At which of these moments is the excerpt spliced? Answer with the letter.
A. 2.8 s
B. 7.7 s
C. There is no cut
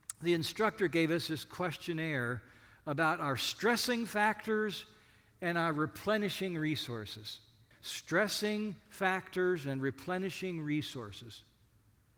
B